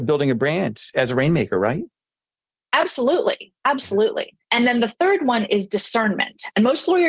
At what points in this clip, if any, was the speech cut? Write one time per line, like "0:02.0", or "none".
0:04.4